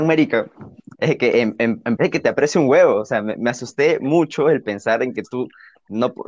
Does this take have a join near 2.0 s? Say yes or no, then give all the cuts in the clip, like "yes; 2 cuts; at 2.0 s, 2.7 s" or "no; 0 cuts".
yes; 1 cut; at 2.0 s